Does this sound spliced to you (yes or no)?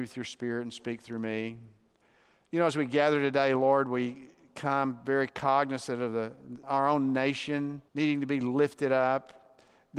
yes